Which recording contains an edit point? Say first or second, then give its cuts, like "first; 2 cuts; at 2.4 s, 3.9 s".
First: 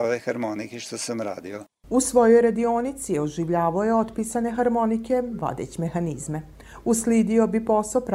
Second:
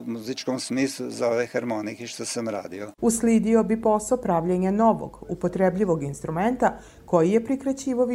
second; 1 cut; at 3.0 s